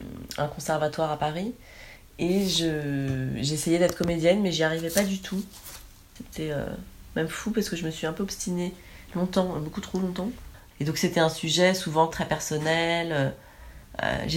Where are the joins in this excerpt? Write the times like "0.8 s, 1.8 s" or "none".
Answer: 10.7 s, 12.1 s